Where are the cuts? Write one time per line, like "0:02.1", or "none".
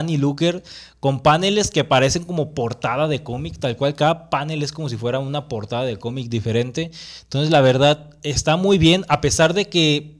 none